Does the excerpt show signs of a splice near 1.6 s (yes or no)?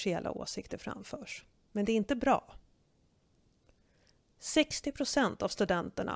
yes